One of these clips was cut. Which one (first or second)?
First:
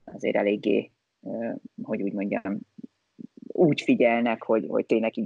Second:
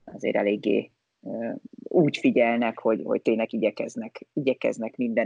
second